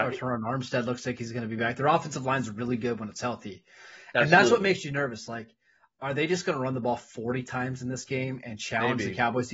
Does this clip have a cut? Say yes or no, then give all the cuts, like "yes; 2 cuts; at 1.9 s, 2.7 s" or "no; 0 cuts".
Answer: no; 0 cuts